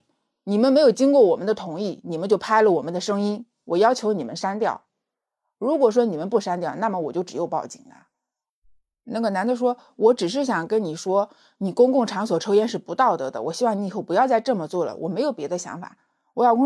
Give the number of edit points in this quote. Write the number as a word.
zero